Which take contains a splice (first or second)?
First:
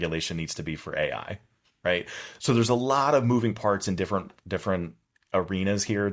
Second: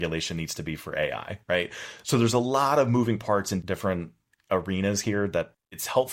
second